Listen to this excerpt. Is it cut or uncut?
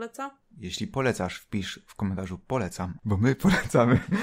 cut